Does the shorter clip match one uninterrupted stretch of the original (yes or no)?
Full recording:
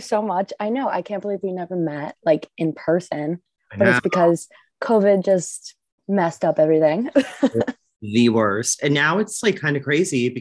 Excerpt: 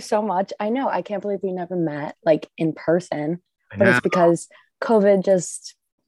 yes